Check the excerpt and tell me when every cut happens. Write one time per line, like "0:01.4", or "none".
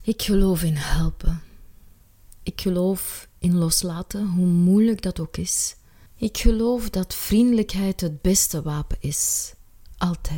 0:06.1